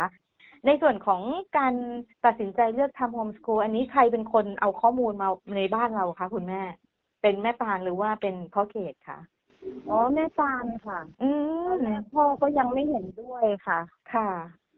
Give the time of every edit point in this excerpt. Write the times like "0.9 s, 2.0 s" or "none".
2.1 s, 11.1 s